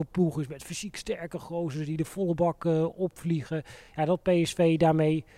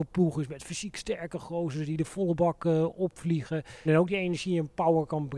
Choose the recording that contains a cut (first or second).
second